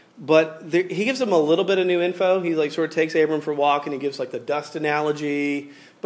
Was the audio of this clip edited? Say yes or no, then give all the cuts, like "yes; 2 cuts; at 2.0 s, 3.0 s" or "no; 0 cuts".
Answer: no; 0 cuts